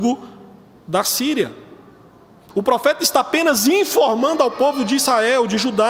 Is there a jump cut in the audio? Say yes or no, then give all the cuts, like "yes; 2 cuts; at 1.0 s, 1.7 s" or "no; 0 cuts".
yes; 1 cut; at 2.5 s